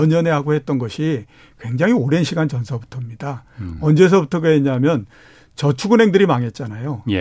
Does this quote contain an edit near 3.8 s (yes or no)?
no